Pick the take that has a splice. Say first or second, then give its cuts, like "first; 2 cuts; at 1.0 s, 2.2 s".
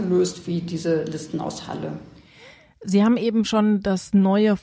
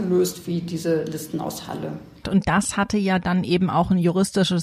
second; 1 cut; at 2.2 s